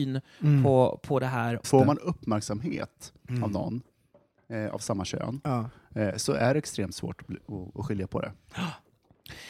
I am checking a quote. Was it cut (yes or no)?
yes